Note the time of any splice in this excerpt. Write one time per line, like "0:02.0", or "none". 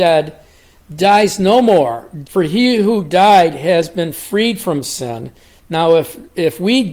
0:02.2